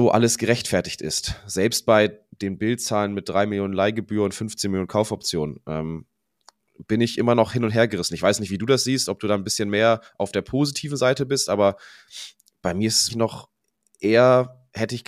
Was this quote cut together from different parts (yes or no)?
yes